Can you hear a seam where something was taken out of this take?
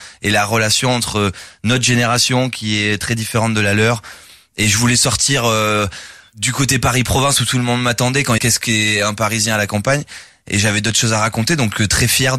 yes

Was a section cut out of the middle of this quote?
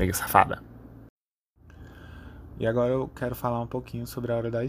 yes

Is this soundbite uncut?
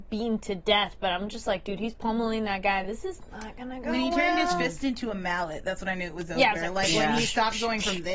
yes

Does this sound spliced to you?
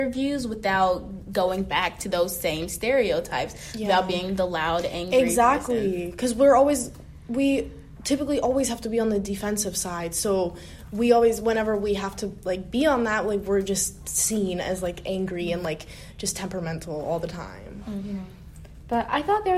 no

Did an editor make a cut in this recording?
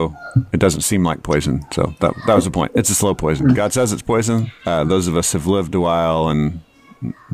yes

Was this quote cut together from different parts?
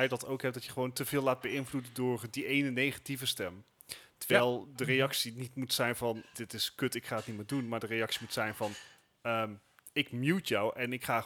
yes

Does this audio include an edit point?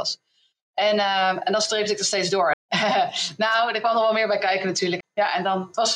yes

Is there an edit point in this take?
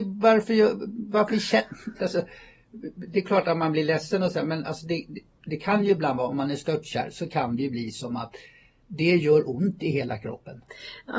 no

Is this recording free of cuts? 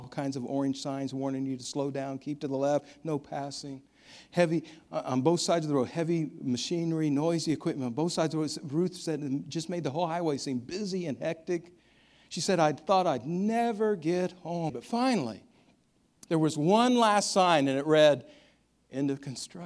no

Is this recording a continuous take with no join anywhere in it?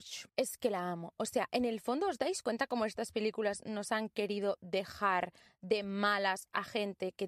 yes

